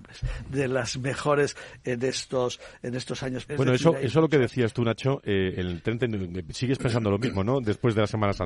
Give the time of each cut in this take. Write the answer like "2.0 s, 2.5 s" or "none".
3.5 s